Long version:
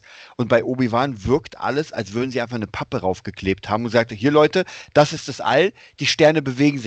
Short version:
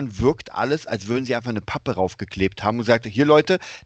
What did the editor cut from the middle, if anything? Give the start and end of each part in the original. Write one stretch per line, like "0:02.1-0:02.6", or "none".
none